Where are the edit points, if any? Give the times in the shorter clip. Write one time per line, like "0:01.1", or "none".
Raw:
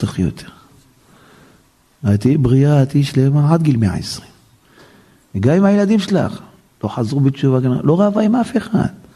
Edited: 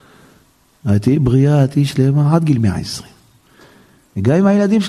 none